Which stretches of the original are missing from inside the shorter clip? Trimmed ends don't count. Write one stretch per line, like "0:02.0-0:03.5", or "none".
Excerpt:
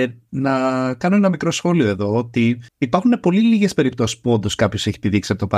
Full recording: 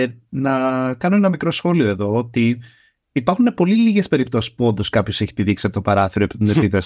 0:02.7-0:03.0

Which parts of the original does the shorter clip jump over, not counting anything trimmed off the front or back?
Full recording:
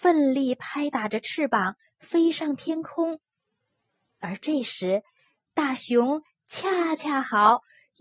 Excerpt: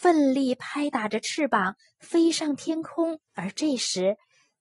0:03.3-0:04.1

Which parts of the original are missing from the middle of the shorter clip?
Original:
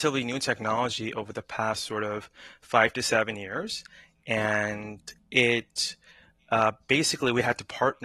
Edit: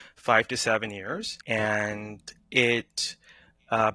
0:03.9-0:04.2

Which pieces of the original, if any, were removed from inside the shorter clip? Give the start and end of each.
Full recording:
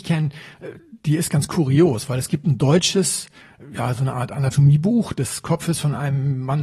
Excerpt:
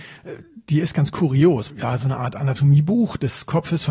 0:02.1-0:03.7

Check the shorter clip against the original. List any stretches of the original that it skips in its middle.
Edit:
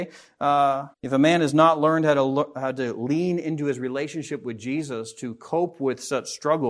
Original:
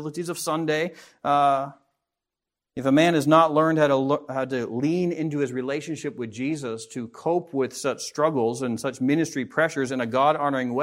0:01.8-0:02.7

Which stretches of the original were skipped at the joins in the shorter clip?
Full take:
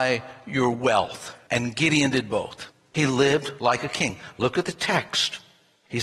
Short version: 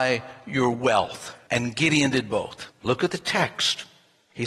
0:02.8-0:04.3

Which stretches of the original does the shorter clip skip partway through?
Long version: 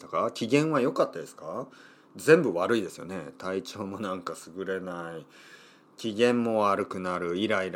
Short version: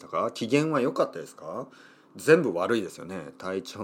none

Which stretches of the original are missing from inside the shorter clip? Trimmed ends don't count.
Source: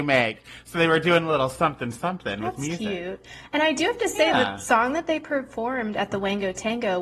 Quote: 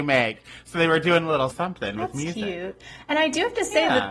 0:01.5-0:01.9

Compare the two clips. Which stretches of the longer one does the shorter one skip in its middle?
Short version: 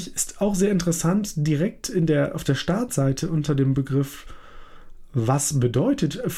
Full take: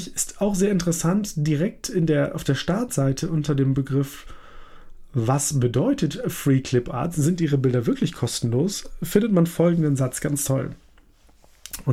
none

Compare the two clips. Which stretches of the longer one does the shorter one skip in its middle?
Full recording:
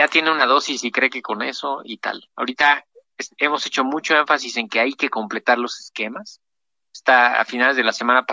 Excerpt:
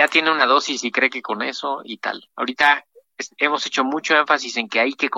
none

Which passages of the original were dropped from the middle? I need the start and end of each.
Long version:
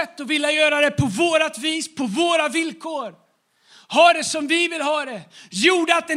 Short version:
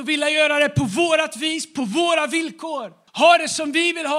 0:03.3-0:03.8

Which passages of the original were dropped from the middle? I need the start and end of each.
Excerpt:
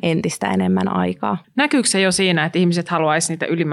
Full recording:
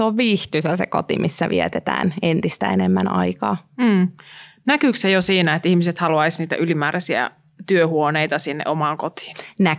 0:03.6-0:04.5

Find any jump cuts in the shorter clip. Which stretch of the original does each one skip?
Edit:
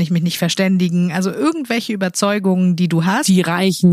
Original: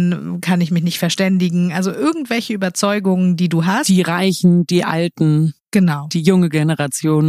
none

